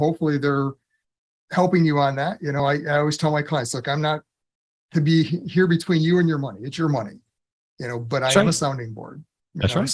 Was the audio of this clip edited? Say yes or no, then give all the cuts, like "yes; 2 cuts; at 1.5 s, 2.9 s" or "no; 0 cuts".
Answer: no; 0 cuts